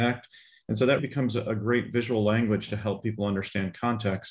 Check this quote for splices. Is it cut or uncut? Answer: cut